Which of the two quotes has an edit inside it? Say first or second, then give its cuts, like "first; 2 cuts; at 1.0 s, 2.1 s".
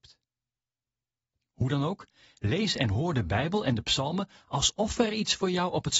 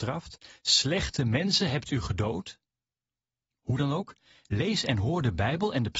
second; 1 cut; at 3.5 s